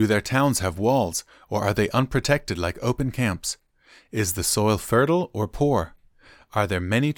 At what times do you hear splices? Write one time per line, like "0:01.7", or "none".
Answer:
none